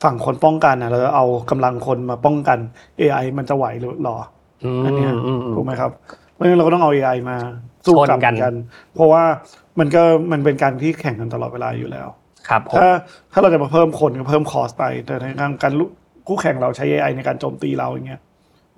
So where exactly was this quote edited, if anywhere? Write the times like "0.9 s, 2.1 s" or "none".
none

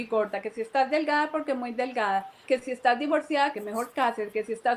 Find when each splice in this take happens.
2.5 s, 3.5 s

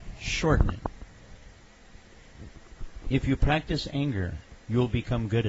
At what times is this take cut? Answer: none

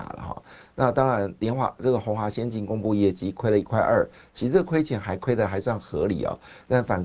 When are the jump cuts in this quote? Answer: 1.4 s

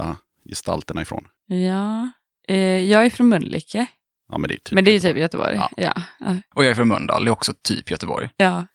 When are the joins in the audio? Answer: none

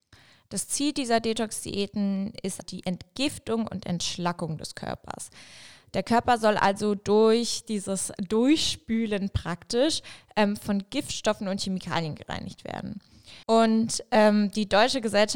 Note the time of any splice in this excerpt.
2.6 s, 13.4 s

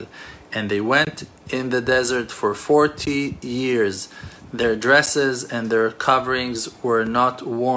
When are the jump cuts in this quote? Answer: none

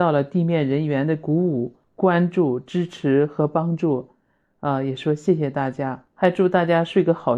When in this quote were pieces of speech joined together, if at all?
none

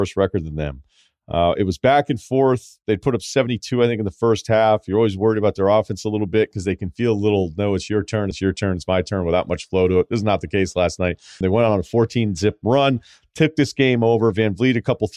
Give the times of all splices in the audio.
8.3 s, 11.4 s

